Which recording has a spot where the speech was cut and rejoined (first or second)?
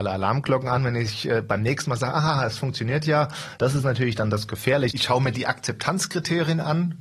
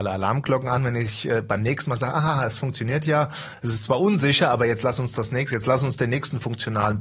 first